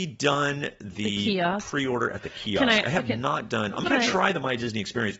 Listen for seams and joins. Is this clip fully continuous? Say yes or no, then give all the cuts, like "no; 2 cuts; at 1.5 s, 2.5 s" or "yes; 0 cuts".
yes; 0 cuts